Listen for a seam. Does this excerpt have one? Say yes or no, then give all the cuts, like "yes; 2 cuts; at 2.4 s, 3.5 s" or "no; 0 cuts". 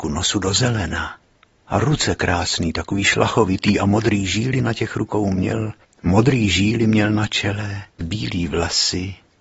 yes; 2 cuts; at 5.8 s, 7.9 s